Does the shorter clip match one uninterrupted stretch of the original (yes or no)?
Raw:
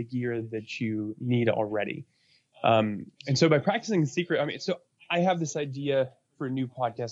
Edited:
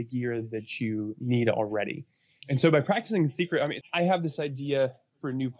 no